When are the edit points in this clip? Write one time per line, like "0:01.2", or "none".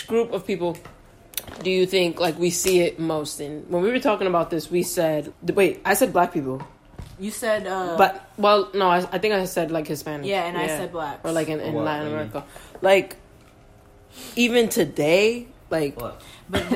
0:05.3